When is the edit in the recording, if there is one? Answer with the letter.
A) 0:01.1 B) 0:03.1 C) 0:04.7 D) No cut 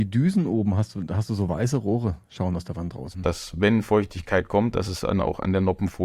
B